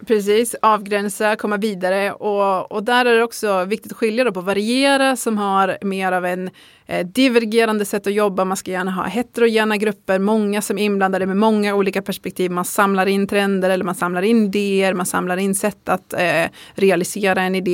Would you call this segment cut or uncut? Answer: uncut